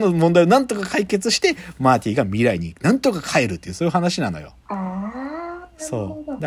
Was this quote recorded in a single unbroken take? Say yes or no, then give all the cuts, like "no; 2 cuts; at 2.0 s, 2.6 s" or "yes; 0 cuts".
yes; 0 cuts